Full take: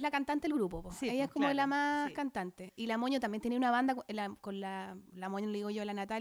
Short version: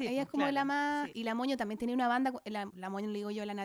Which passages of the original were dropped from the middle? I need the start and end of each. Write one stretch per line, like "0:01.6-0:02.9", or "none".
0:02.1-0:02.7
0:04.3-0:05.1